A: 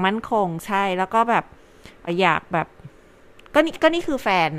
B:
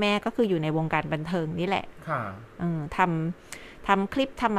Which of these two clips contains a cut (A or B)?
A